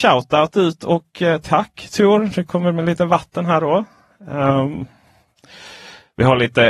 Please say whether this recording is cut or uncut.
uncut